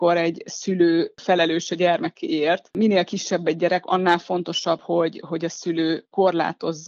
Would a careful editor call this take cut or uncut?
uncut